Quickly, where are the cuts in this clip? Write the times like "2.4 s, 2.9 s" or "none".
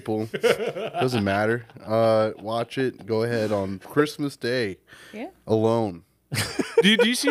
none